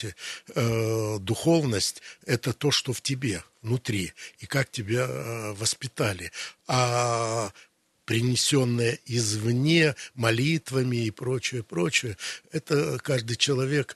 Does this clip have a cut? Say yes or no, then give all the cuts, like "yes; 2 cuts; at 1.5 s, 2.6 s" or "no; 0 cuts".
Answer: no; 0 cuts